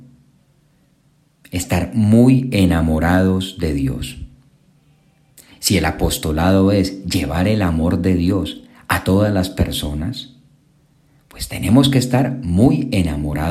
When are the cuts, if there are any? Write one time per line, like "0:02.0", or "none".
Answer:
none